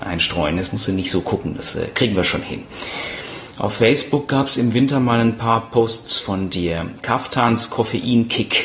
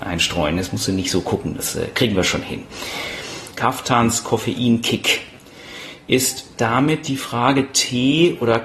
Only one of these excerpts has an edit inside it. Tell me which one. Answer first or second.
second